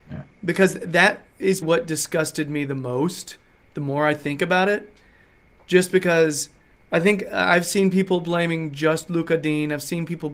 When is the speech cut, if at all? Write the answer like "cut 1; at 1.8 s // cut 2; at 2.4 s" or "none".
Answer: cut 1; at 1.6 s